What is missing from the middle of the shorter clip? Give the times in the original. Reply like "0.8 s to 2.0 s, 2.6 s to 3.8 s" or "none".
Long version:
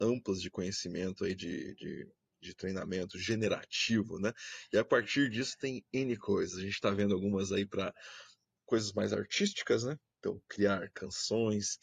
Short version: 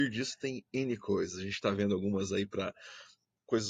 none